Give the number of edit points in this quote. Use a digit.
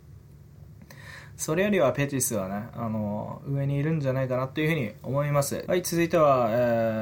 1